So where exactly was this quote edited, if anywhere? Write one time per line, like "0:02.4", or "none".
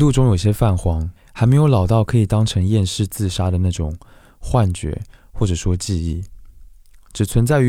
0:01.2